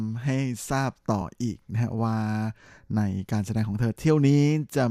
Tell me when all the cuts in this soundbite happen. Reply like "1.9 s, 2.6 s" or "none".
none

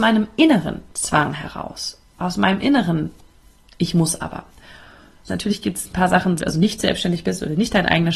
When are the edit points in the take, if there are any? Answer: 5.3 s, 6.4 s

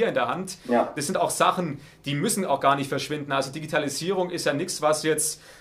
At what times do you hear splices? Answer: none

